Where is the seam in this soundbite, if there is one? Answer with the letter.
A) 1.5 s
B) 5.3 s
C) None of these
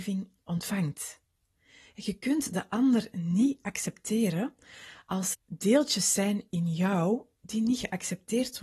B